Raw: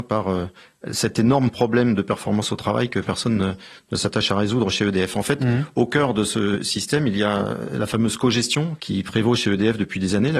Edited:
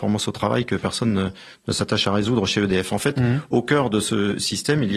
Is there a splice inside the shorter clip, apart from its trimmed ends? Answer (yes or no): no